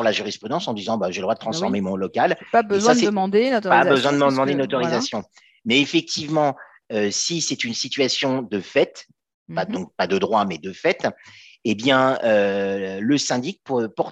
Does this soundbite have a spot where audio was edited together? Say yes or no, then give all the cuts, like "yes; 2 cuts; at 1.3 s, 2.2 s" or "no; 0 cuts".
no; 0 cuts